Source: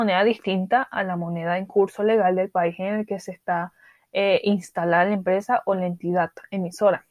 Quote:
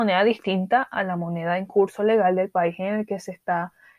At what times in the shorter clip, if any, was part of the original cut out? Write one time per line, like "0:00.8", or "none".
none